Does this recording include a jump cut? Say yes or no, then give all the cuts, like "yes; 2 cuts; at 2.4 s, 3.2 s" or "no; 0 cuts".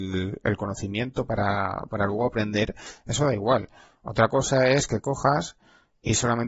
no; 0 cuts